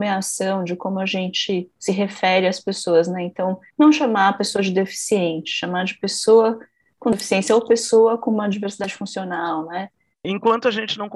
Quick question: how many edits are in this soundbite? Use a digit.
1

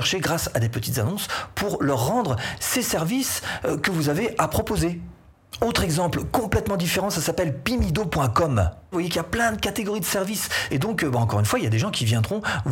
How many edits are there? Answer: 2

